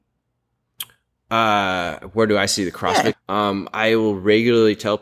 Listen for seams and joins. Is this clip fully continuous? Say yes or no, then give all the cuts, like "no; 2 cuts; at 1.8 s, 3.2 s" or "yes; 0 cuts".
no; 1 cut; at 3.1 s